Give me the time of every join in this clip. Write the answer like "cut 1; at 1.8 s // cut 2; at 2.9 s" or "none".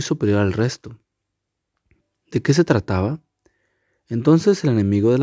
none